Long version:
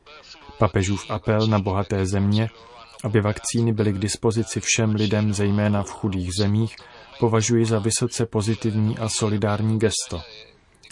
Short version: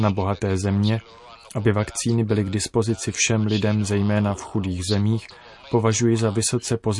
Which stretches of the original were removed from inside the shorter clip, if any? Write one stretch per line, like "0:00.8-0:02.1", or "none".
none